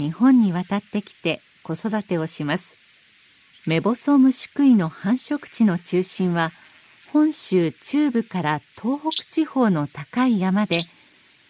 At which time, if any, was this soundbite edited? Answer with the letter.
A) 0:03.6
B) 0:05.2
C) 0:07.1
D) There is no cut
A